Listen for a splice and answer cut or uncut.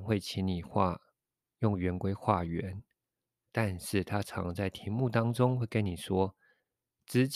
uncut